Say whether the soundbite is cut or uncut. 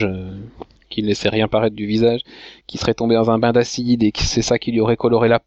uncut